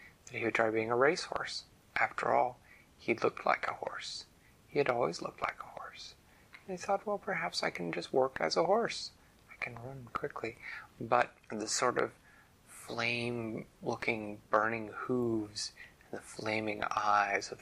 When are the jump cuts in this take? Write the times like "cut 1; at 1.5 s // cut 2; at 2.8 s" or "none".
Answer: cut 1; at 10.1 s // cut 2; at 11.4 s